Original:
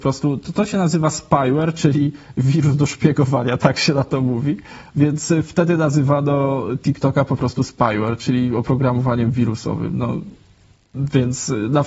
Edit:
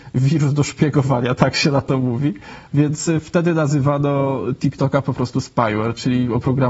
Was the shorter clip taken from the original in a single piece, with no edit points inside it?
yes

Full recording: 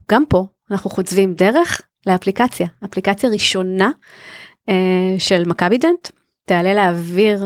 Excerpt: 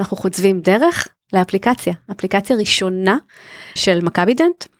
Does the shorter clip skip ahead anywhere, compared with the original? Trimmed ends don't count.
yes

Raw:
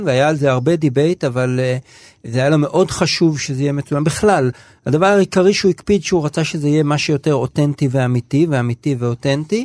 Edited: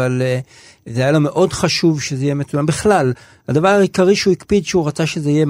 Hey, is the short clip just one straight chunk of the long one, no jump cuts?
yes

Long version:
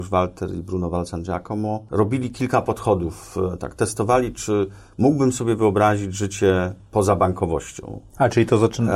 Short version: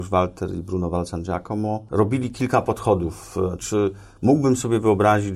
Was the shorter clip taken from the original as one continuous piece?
no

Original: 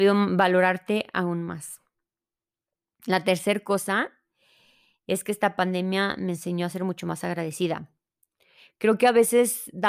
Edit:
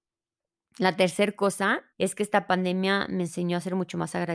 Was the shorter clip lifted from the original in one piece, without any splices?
no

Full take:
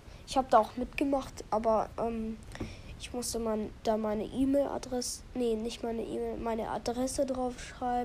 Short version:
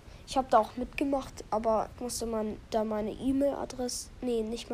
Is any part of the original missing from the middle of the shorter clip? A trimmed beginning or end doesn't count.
yes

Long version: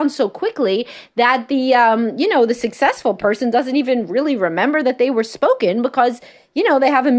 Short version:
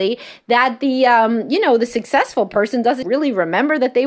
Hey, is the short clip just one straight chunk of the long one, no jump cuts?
no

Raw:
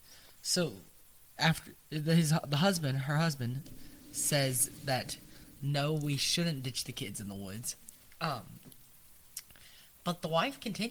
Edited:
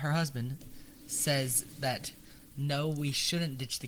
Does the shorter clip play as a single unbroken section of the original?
yes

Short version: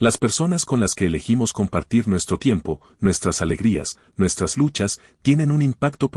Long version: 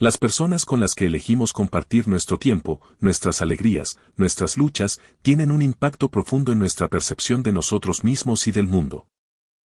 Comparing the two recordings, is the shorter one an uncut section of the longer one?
yes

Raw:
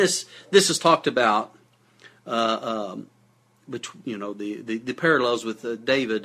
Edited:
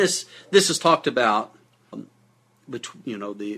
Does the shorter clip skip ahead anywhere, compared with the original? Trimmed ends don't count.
yes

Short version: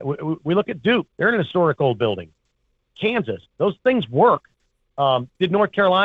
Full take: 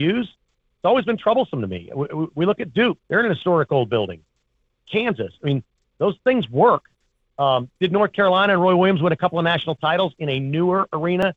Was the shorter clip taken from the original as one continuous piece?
no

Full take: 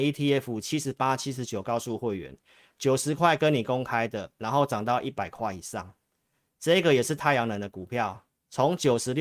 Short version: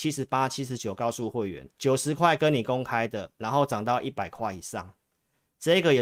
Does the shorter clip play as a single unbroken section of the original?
no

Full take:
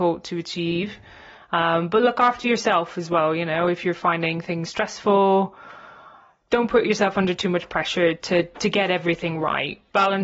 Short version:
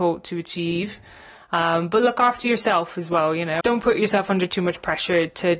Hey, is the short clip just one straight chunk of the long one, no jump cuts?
no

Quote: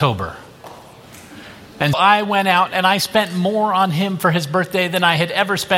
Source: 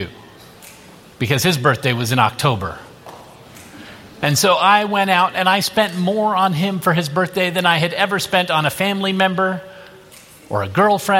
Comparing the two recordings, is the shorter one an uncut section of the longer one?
no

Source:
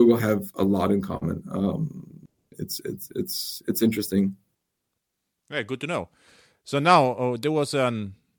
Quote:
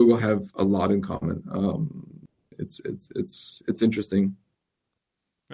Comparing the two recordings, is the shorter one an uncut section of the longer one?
yes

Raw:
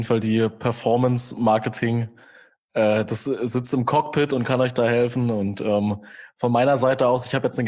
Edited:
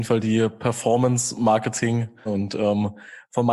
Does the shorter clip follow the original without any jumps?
no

